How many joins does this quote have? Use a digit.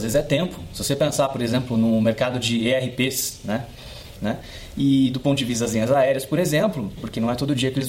2